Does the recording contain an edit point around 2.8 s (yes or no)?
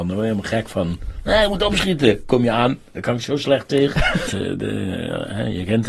no